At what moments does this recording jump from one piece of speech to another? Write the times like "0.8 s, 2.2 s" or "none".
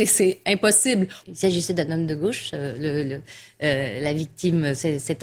1.2 s